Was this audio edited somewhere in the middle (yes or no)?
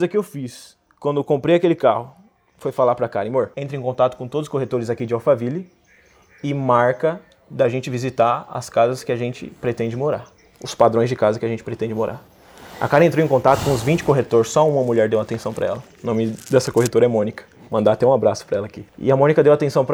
no